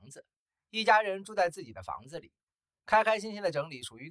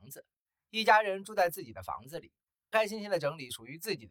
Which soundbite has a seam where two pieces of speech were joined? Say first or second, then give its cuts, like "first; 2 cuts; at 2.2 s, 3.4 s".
second; 1 cut; at 2.7 s